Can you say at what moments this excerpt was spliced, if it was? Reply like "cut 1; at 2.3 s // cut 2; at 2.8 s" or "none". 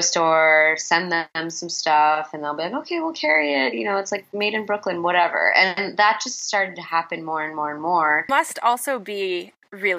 cut 1; at 8.3 s